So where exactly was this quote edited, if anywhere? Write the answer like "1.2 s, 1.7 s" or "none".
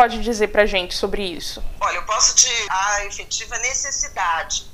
2.7 s